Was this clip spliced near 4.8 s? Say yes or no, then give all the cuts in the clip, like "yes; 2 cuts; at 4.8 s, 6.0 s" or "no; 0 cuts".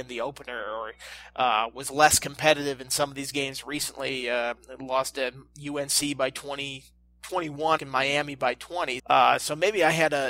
no; 2 cuts; at 7.8 s, 9.0 s